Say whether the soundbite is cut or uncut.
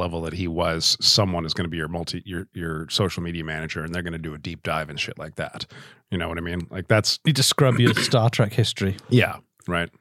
uncut